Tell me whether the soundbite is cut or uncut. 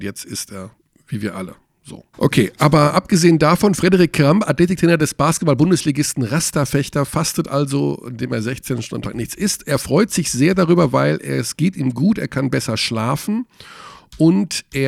cut